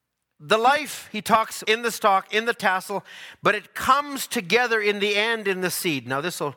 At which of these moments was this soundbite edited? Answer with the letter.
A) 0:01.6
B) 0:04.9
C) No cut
A